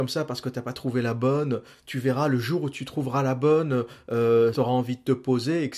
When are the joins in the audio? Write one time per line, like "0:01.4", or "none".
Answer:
0:04.5